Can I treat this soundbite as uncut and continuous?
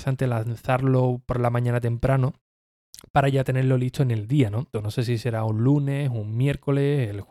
no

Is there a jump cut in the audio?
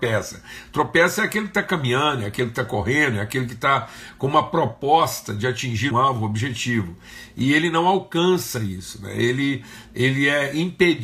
yes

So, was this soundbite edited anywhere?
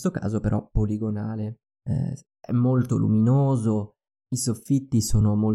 yes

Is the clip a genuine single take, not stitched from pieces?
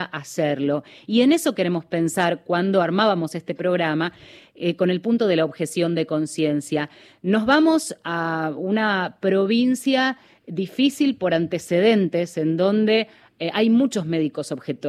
yes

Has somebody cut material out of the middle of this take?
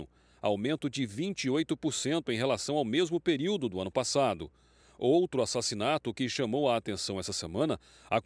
no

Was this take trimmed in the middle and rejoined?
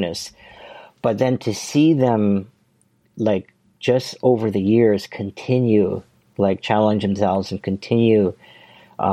no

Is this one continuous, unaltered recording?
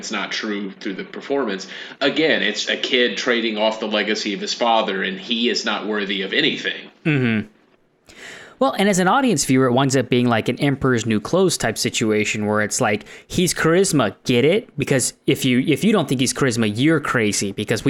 no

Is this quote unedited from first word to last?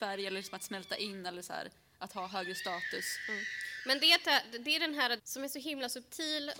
no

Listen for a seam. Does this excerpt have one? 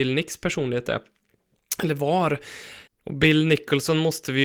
yes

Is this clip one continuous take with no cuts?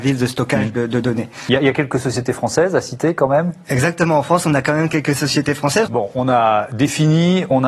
no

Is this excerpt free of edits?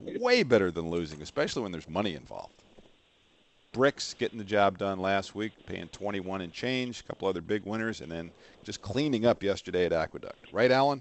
no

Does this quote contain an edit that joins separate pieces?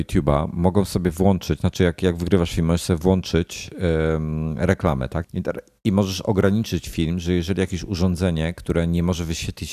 yes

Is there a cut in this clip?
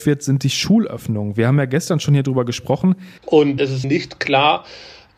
yes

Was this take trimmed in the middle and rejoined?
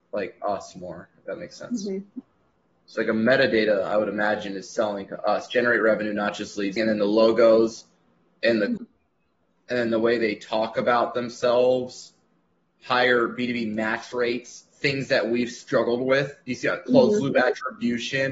yes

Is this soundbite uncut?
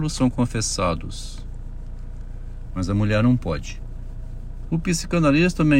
no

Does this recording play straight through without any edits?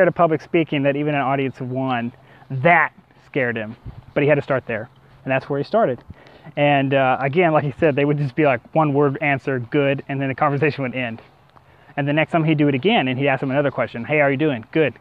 yes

